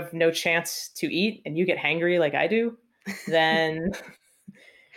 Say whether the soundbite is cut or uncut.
uncut